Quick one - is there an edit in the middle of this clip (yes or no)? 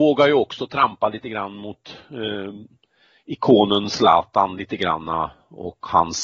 no